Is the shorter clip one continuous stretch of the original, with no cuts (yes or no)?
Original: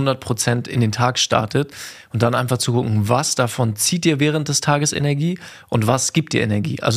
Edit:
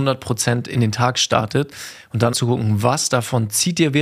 no